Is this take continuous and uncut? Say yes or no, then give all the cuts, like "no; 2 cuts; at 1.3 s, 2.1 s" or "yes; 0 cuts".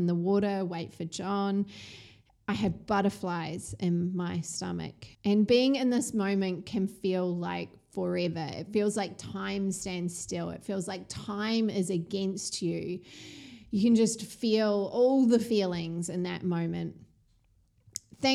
no; 1 cut; at 5.1 s